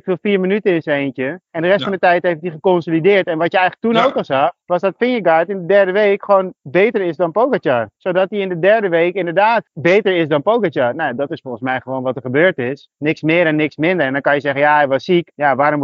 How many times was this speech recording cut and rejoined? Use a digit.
1